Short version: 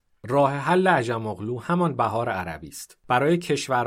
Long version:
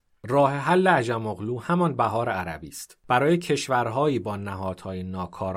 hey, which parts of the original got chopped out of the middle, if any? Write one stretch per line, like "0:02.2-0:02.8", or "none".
none